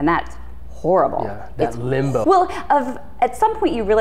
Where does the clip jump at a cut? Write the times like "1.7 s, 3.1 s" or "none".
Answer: 2.2 s